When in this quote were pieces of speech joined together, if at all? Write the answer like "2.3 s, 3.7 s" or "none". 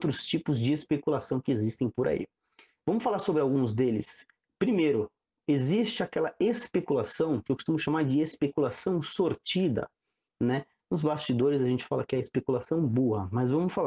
none